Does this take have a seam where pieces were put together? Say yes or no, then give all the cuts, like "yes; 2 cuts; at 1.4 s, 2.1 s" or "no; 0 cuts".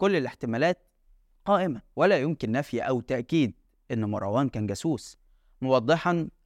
no; 0 cuts